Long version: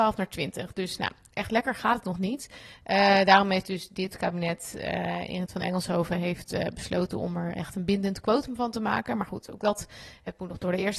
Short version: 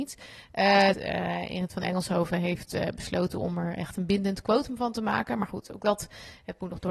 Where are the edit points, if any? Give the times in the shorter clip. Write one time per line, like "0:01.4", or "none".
0:00.9